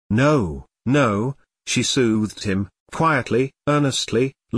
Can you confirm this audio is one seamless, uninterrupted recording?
yes; 0 cuts

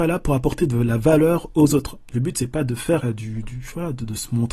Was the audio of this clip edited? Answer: no; 0 cuts

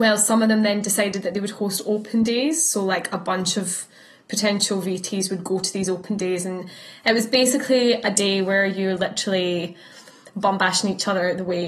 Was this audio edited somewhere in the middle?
no; 0 cuts

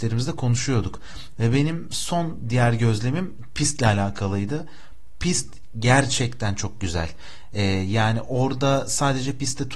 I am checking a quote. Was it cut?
yes; 1 cut; at 1.3 s

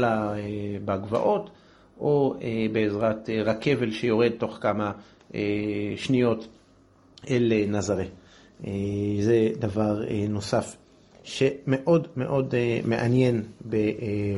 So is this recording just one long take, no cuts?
yes; 0 cuts

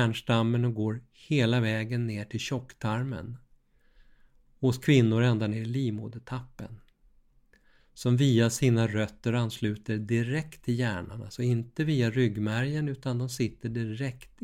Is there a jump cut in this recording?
yes; 1 cut; at 7.8 s

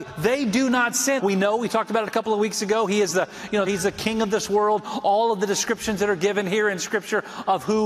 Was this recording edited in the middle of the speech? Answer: yes; 2 cuts; at 1.2 s, 3.7 s

